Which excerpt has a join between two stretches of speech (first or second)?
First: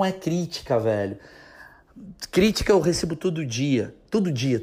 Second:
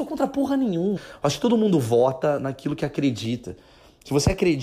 second